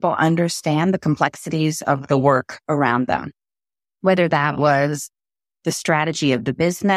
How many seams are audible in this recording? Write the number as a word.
zero